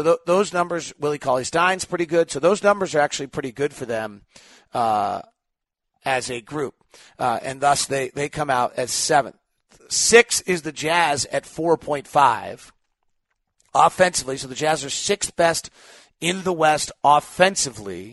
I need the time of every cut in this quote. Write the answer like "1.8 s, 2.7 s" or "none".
none